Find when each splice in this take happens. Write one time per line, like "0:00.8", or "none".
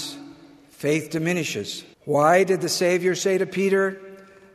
0:01.9

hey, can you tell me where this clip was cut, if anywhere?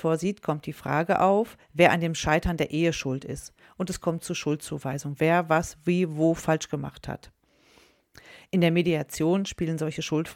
none

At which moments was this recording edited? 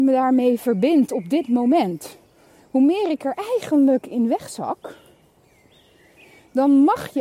none

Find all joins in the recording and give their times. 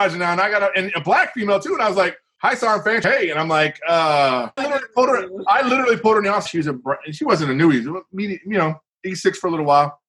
0:03.0
0:04.6
0:06.5

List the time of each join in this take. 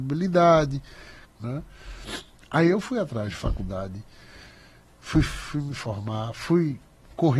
0:01.2

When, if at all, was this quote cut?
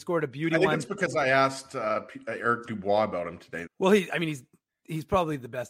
0:03.7

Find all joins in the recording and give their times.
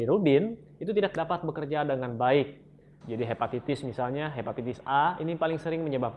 0:03.0

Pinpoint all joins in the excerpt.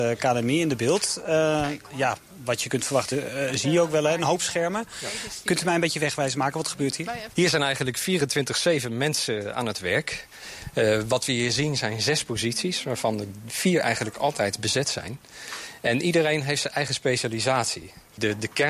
none

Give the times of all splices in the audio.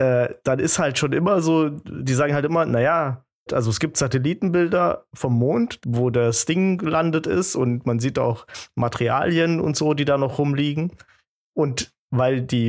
0:03.5
0:05.8

